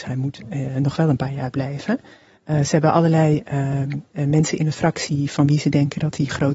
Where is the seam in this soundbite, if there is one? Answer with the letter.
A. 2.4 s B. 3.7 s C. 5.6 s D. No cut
D